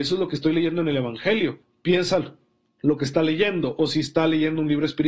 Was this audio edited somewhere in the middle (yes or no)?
yes